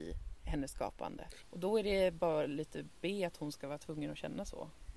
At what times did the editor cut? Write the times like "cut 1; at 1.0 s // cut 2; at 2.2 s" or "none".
cut 1; at 1.4 s